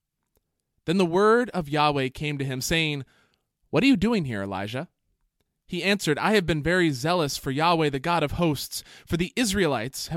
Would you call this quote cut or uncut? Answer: uncut